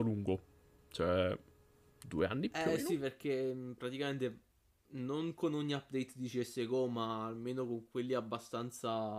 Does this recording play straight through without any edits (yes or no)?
yes